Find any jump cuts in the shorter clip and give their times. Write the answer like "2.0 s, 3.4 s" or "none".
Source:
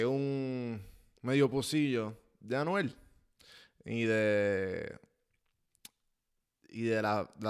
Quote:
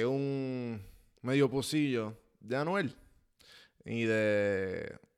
none